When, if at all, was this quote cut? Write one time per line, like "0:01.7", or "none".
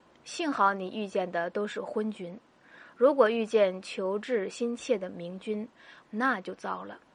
0:06.0